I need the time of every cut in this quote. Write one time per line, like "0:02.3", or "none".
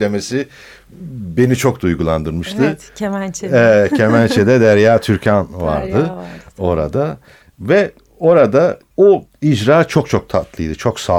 none

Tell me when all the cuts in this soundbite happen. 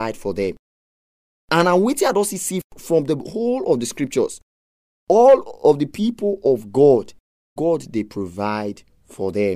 0:07.6

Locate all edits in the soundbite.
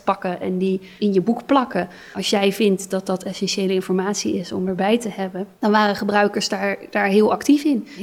none

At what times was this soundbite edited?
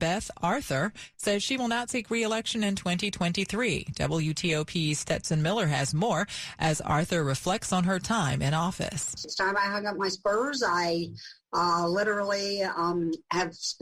none

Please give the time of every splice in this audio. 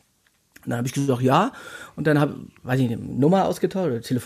none

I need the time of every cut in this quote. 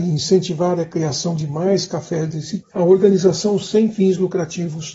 0:02.6

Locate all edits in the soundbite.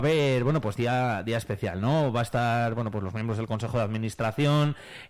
none

